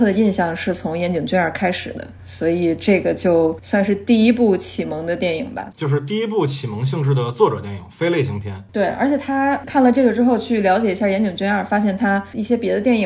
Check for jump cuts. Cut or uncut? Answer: cut